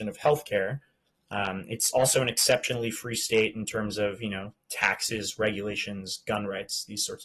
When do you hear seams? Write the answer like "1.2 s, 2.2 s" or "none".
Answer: none